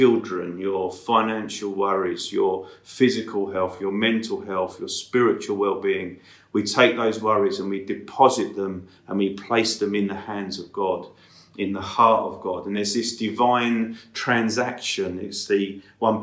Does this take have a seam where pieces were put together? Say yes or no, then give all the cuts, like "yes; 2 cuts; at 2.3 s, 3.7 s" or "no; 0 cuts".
no; 0 cuts